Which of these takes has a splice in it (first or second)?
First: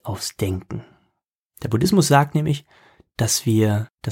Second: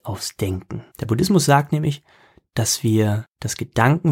second